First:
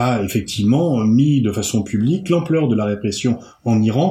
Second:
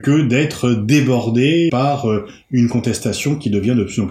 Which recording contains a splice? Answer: second; 1 cut; at 1.7 s

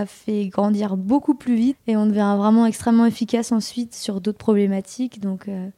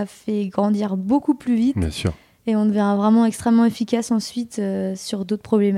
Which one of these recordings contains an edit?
first; 2 cuts; at 1.7 s, 3.9 s

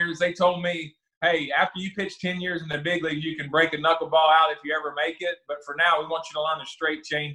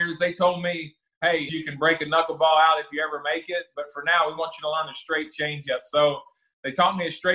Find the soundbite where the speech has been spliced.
second; 1 cut; at 1.5 s

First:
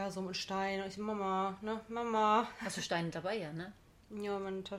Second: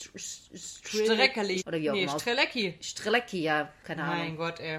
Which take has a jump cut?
second; 1 cut; at 1.6 s

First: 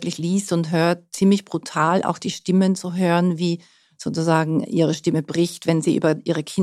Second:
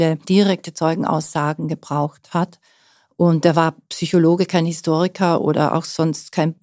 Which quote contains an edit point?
first; 1 cut; at 4.6 s

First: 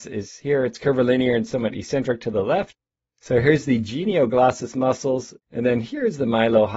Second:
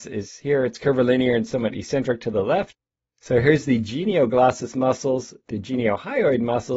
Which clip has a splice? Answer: first; 1 cut; at 5.4 s

